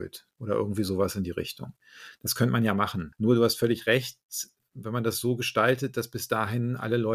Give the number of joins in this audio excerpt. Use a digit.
1